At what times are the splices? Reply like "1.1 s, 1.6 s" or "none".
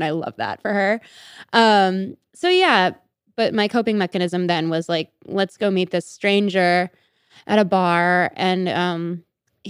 none